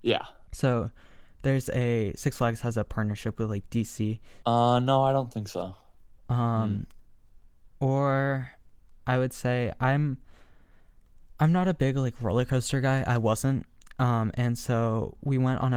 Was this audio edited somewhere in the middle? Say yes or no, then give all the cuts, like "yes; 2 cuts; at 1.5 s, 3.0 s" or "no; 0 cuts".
yes; 2 cuts; at 4.4 s, 6.2 s